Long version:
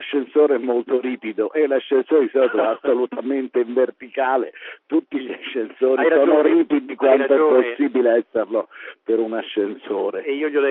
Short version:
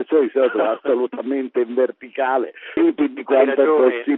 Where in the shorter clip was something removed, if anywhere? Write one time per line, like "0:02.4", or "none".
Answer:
0:02.8